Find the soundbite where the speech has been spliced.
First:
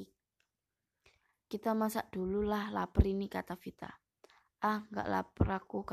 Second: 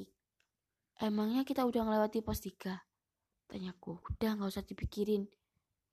second; 2 cuts; at 0.9 s, 4.0 s

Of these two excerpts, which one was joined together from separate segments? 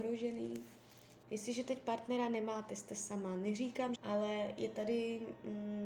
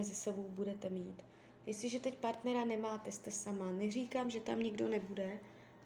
first; 2 cuts; at 1.2 s, 4.0 s

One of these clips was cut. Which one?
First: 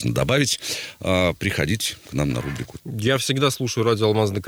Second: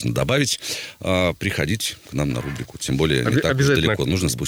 first; 1 cut; at 2.8 s

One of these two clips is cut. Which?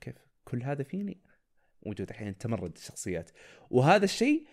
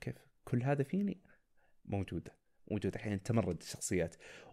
first; 1 cut; at 1.7 s

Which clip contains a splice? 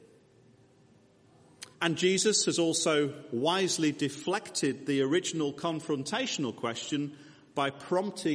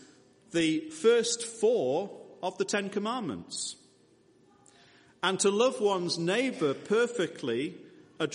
first; 1 cut; at 1.7 s

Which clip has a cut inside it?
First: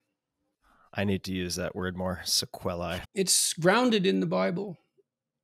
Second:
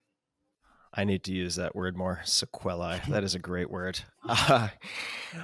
first; 1 cut; at 3.0 s

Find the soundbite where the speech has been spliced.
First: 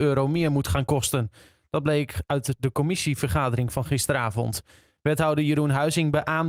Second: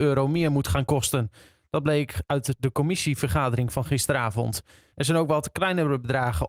second; 1 cut; at 4.9 s

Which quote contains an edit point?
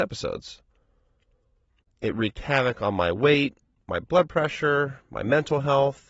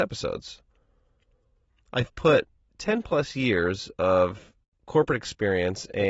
first; 1 cut; at 1.8 s

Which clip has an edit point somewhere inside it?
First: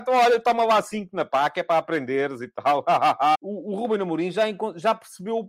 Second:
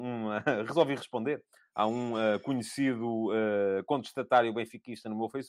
first; 1 cut; at 3.3 s

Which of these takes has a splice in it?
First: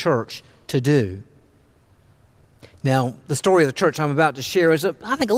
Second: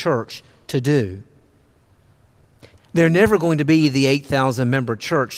second; 1 cut; at 2.8 s

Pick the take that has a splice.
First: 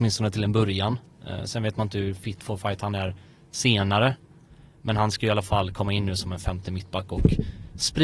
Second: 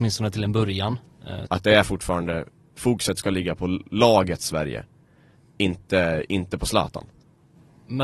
second; 1 cut; at 1.5 s

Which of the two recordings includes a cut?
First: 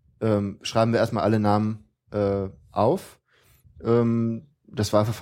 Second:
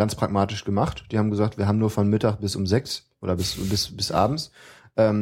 first; 1 cut; at 3.6 s

